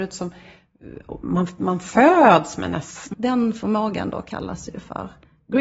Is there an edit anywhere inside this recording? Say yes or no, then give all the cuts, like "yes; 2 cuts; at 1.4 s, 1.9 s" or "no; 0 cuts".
yes; 1 cut; at 3.1 s